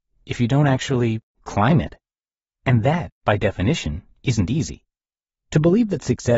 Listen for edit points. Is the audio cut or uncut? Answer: cut